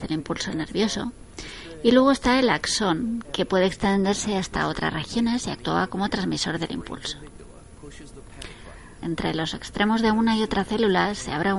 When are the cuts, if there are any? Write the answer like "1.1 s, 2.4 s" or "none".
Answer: 3.2 s, 9.0 s